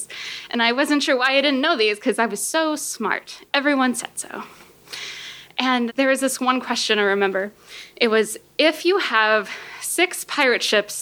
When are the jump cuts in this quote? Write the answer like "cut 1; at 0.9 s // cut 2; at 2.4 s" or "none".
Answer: cut 1; at 5.9 s

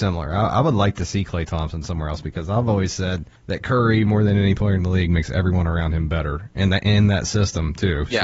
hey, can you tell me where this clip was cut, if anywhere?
cut 1; at 3.4 s

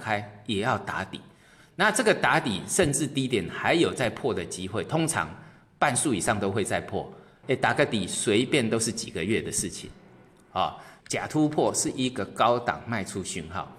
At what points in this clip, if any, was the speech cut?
cut 1; at 7.4 s // cut 2; at 11.0 s

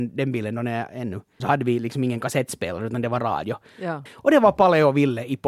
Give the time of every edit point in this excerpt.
cut 1; at 1.4 s // cut 2; at 4.1 s

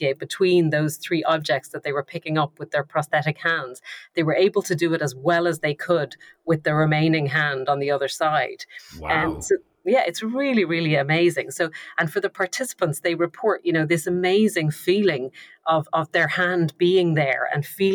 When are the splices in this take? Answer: none

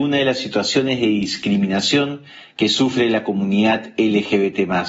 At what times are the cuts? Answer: none

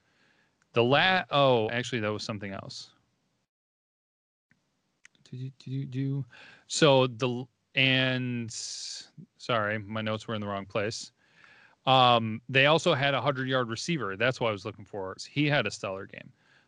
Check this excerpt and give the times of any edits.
cut 1; at 1.7 s // cut 2; at 15.2 s

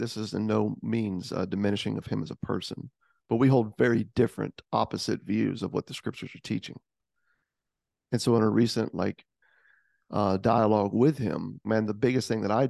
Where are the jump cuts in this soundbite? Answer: cut 1; at 11.6 s

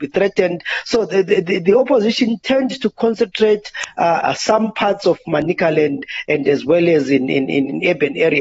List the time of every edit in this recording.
cut 1; at 4.2 s

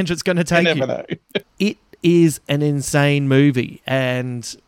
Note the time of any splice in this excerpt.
cut 1; at 1.4 s

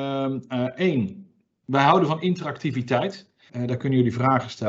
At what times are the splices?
cut 1; at 3.5 s

